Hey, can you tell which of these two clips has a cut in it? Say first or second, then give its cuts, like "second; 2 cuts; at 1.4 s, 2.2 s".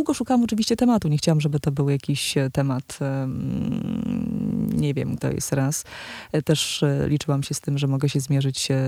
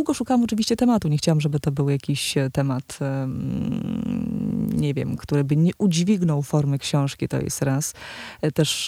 first; 1 cut; at 5.2 s